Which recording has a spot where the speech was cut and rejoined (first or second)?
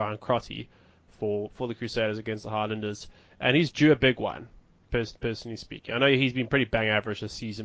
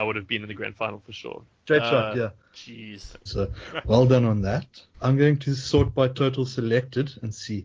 second